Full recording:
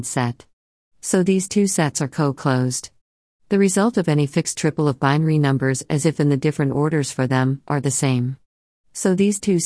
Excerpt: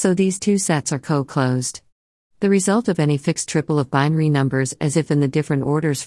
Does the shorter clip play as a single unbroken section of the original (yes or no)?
yes